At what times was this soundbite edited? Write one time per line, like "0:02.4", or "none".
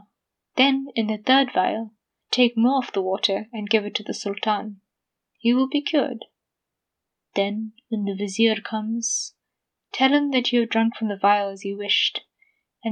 none